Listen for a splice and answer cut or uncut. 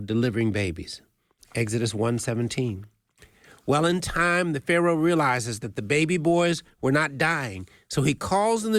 cut